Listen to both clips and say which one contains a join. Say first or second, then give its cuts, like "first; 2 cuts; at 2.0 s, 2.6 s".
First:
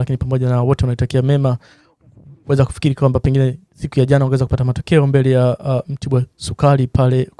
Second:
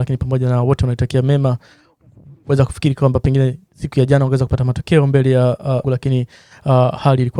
second; 1 cut; at 5.8 s